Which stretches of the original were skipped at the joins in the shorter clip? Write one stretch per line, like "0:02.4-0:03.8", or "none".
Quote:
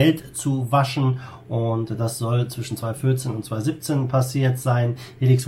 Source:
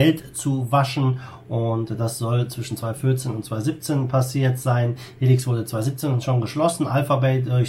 none